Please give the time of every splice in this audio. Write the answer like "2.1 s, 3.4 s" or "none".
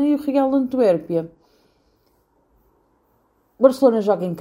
none